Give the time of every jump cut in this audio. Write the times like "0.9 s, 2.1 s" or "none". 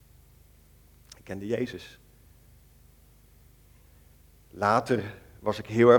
none